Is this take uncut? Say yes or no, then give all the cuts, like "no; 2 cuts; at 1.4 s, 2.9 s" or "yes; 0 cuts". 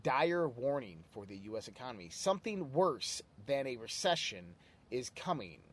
yes; 0 cuts